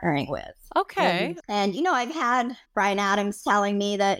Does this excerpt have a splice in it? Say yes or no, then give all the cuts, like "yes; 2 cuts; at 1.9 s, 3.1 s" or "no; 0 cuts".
yes; 2 cuts; at 1.4 s, 2.6 s